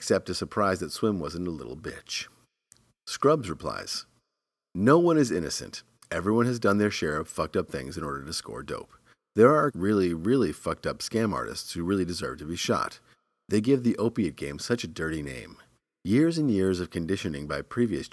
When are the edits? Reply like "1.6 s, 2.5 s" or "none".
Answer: 9.7 s

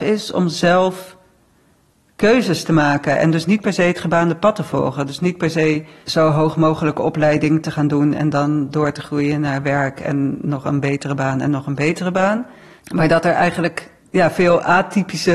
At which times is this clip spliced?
none

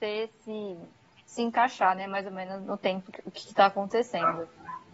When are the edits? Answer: 2.6 s

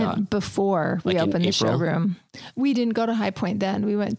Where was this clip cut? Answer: none

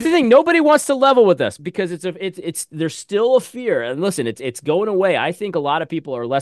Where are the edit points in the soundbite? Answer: 1.6 s

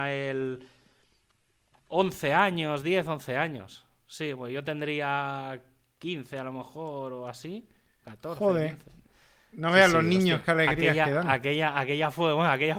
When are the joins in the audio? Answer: none

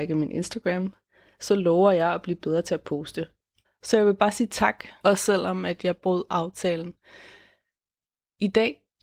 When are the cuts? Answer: 3.6 s, 5.0 s

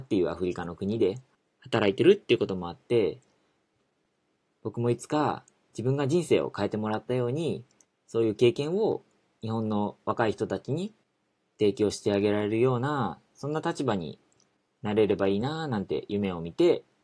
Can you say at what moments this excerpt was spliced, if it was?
none

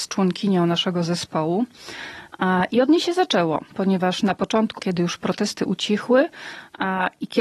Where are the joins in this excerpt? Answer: 4.8 s

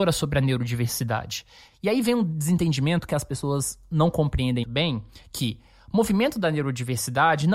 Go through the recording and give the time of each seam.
4.6 s

